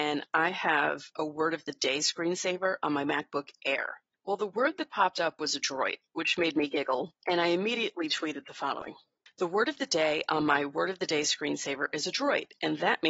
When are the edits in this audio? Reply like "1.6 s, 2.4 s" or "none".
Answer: none